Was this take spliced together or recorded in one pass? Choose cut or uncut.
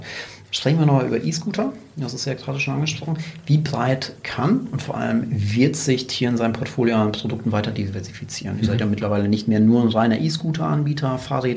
uncut